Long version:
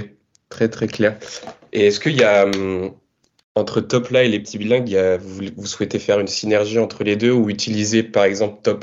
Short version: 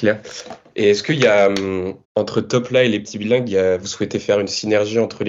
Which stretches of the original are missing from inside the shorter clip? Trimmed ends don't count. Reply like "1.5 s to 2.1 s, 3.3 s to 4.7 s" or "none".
3.0 s to 3.4 s, 5.2 s to 5.6 s